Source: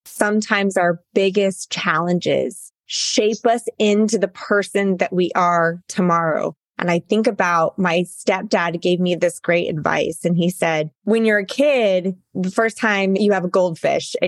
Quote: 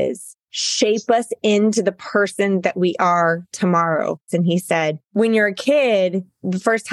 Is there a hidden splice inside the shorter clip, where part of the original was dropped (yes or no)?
yes